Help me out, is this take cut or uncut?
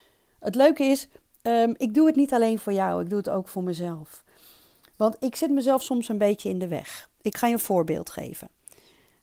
uncut